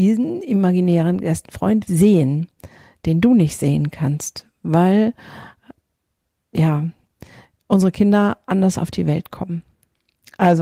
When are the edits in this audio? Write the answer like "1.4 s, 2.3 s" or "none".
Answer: 1.9 s